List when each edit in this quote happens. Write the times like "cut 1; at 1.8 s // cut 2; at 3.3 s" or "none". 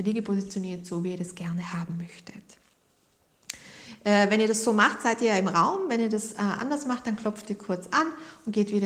none